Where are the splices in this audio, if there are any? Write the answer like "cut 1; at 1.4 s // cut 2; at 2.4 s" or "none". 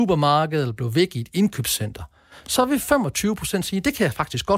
none

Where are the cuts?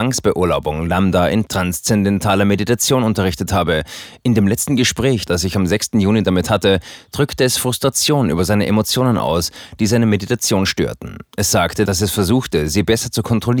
none

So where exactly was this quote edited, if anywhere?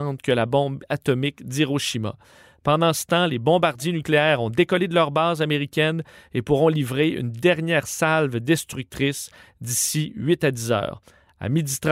none

